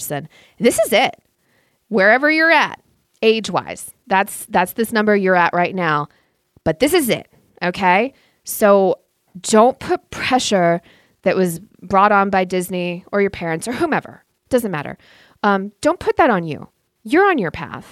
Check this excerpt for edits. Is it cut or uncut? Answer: uncut